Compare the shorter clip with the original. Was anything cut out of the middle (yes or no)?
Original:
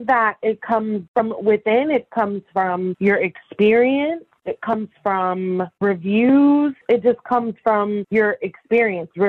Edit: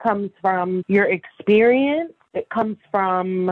no